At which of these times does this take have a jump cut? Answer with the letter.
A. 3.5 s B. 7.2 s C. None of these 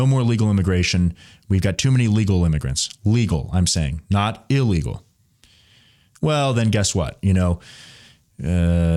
C